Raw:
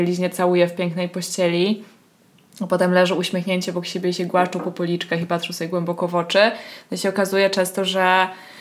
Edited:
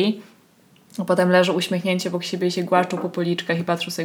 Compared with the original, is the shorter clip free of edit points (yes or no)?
yes